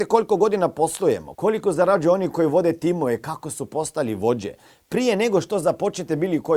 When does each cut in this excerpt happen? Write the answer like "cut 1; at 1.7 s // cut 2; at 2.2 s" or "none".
cut 1; at 1.3 s